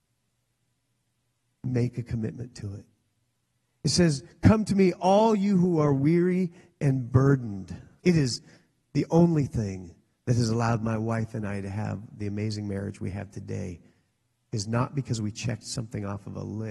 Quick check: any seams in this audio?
yes; 1 cut; at 8.0 s

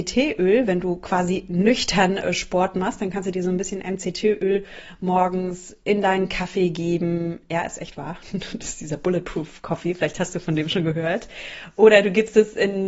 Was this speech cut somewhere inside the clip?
no; 0 cuts

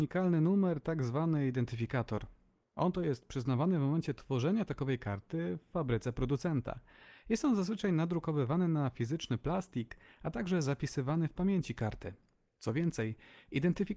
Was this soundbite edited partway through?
no; 0 cuts

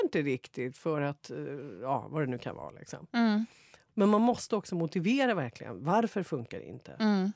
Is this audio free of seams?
yes; 0 cuts

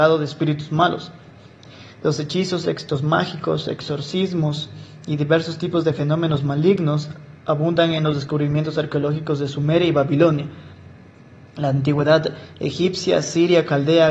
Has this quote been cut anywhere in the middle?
yes; 1 cut; at 2.6 s

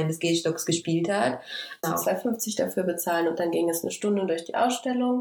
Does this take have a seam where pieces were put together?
yes; 1 cut; at 1.8 s

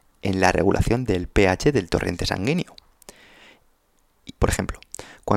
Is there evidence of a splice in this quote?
yes; 1 cut; at 4.4 s

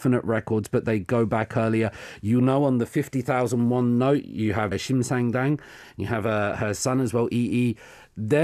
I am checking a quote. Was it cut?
yes; 1 cut; at 4.7 s

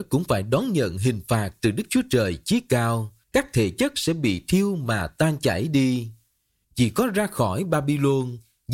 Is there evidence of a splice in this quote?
yes; 2 cuts; at 3.2 s, 6.6 s

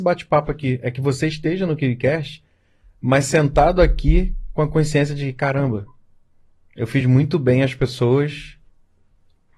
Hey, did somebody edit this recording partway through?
no; 0 cuts

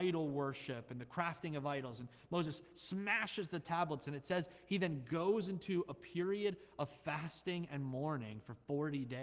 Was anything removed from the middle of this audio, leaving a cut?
no; 0 cuts

